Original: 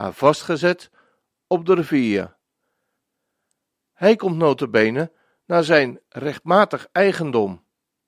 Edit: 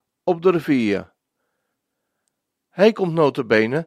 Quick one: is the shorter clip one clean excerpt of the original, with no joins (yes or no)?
yes